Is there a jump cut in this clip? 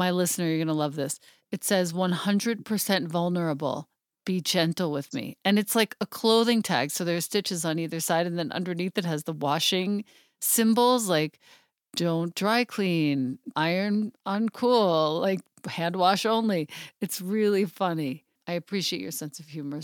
yes; 1 cut; at 13.5 s

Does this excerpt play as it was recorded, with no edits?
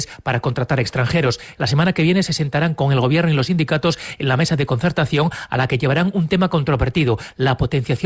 no; 1 cut; at 1.6 s

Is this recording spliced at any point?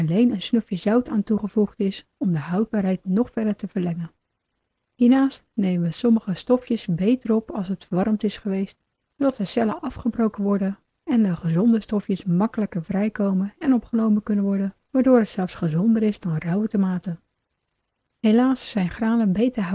yes; 2 cuts; at 14.8 s, 18.0 s

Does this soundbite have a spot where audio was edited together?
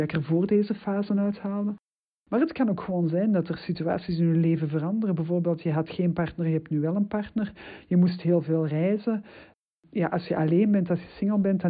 no; 0 cuts

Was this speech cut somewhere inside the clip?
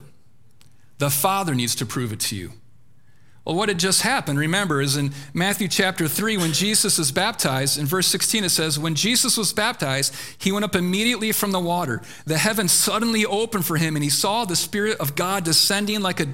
no; 0 cuts

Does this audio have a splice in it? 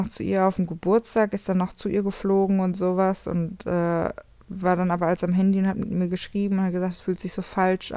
no; 0 cuts

